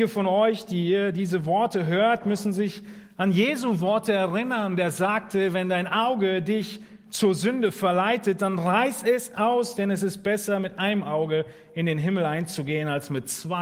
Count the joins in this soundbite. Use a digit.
0